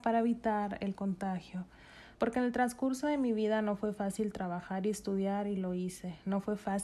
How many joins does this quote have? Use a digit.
1